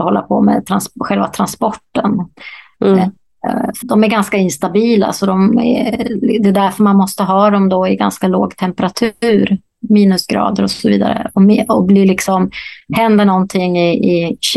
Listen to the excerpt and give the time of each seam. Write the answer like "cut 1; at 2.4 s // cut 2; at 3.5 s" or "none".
cut 1; at 3.8 s